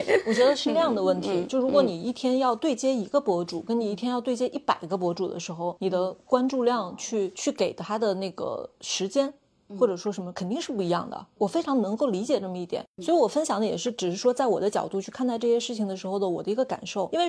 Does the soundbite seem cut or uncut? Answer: uncut